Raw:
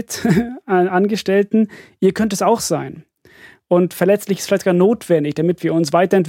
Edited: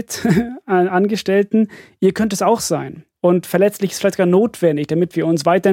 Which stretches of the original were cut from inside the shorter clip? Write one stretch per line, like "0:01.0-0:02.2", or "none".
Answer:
0:03.1-0:03.6